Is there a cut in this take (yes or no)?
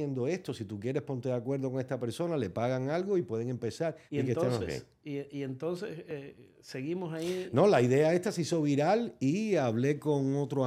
yes